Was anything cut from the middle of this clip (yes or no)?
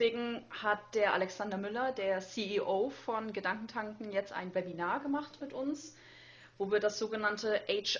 no